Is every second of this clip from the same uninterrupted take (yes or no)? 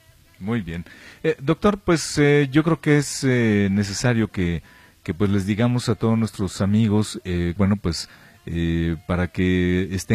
no